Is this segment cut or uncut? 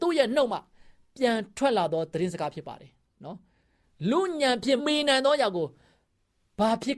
cut